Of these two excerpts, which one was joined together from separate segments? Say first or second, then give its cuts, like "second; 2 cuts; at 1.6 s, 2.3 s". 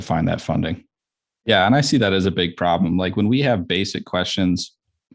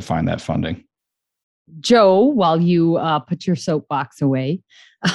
first; 1 cut; at 1.4 s